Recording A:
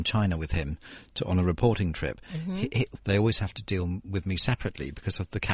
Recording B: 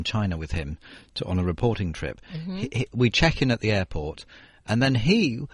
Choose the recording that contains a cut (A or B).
A